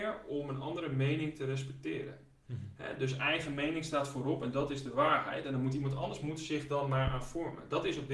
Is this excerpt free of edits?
yes; 0 cuts

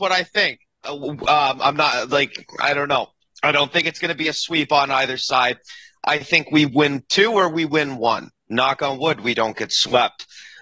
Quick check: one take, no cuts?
yes; 0 cuts

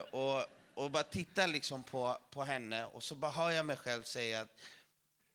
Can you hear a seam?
no; 0 cuts

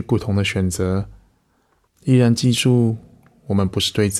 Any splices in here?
yes; 1 cut; at 1.9 s

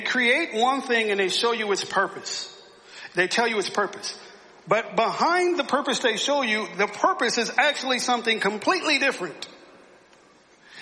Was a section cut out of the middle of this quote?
no; 0 cuts

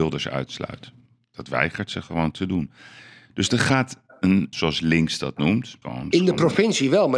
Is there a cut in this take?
yes; 2 cuts; at 4.5 s, 5.8 s

